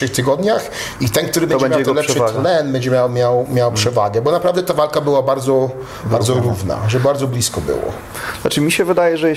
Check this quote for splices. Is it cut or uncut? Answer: uncut